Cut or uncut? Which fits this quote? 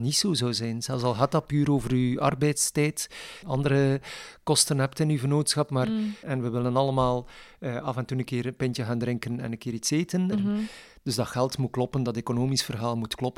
cut